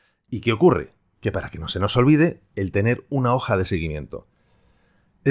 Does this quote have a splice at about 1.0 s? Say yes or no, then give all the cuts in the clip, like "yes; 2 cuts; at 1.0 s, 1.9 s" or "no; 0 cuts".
no; 1 cut; at 2.5 s